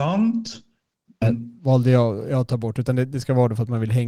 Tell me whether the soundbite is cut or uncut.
cut